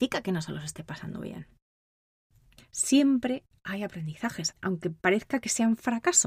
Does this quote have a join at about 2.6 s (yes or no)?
yes